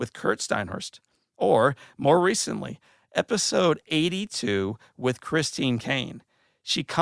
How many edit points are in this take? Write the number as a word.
zero